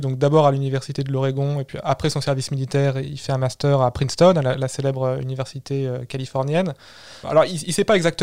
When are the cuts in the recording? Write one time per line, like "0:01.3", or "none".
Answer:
0:07.2